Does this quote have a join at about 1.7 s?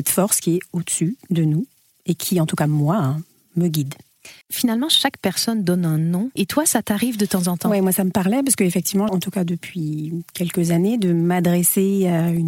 no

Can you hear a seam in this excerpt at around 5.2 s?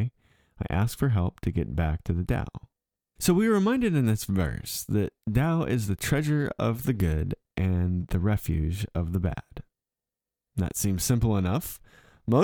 yes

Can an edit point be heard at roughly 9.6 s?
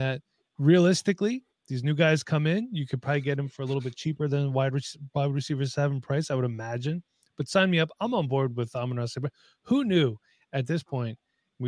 no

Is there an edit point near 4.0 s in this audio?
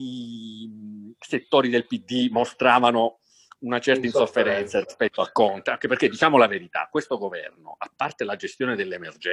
no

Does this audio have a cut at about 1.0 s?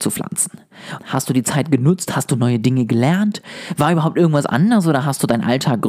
yes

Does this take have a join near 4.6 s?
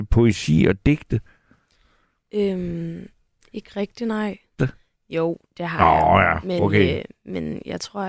yes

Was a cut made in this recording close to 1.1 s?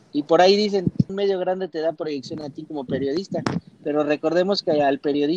yes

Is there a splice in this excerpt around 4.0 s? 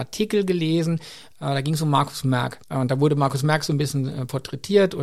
no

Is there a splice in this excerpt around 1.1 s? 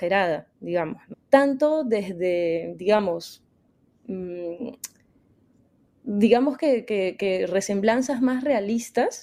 yes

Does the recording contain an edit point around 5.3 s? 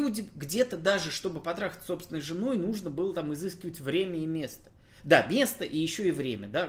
no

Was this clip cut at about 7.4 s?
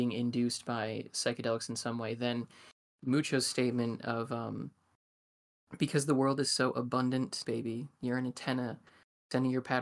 yes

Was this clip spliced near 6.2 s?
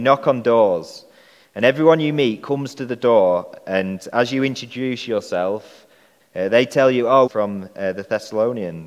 yes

